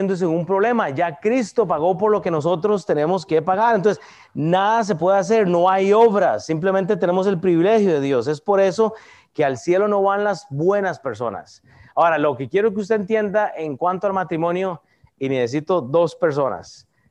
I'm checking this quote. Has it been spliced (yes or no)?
no